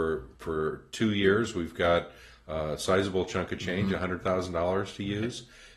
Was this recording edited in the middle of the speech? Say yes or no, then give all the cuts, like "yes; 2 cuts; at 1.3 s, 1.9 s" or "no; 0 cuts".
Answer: no; 0 cuts